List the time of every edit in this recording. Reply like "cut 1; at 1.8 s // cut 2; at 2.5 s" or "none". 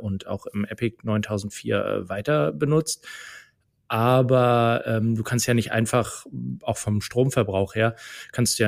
none